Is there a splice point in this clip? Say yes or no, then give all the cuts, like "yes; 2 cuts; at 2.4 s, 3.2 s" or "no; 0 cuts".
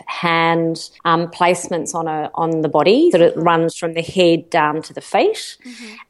yes; 2 cuts; at 1.0 s, 3.1 s